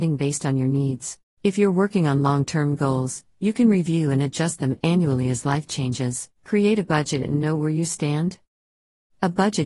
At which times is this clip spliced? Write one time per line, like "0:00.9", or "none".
0:01.4
0:06.3